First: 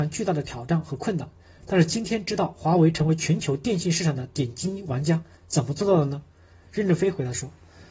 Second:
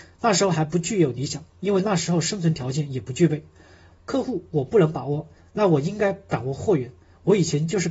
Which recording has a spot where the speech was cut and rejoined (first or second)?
second